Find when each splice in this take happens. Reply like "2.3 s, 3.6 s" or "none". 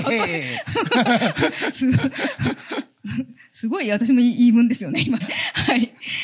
5.2 s